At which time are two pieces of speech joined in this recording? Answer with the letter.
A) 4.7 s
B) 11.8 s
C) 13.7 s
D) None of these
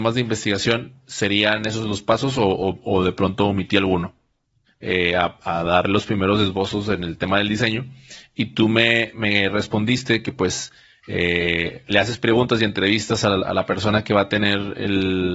A